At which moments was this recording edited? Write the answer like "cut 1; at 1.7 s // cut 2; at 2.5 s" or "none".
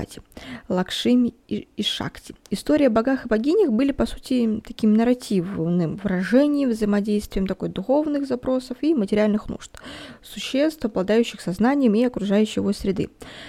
none